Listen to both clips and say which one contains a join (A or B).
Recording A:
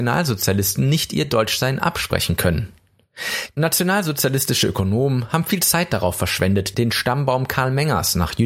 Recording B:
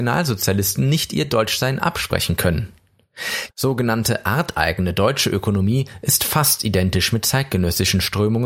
B